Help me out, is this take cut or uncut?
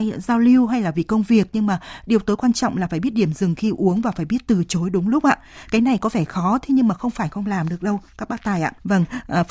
uncut